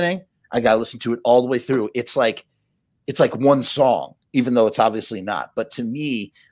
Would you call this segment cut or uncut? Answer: uncut